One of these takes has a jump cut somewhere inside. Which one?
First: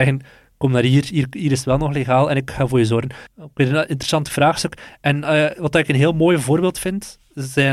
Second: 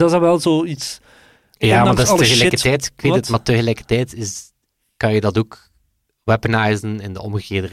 first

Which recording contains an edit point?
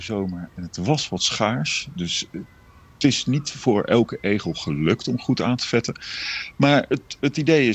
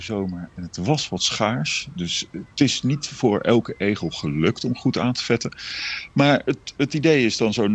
second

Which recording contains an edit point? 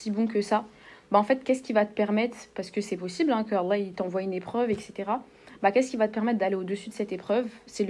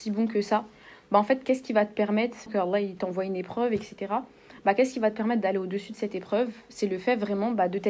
second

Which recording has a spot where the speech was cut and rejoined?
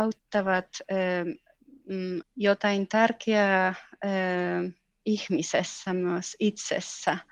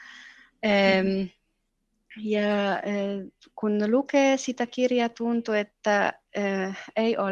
first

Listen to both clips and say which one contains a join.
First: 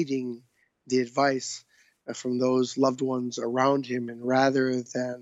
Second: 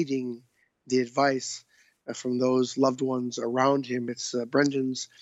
second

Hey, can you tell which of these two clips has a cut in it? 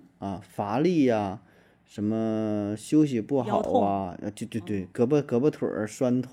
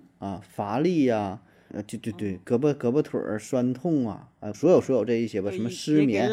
second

